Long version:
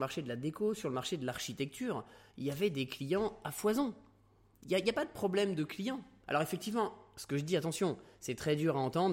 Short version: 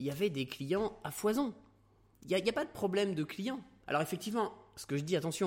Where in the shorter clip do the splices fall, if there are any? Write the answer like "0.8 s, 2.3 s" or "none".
none